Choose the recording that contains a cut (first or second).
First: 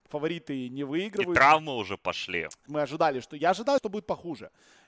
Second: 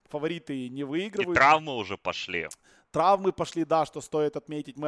first